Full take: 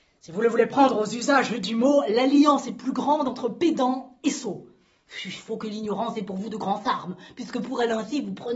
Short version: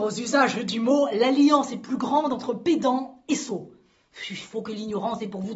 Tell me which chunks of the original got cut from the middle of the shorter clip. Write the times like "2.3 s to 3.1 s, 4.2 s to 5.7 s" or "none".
none